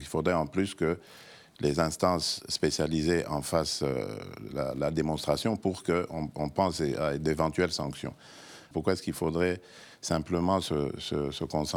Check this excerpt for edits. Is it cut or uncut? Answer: cut